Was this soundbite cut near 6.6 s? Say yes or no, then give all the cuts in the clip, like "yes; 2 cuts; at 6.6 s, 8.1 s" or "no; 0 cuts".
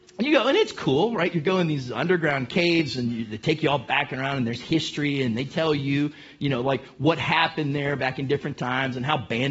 no; 0 cuts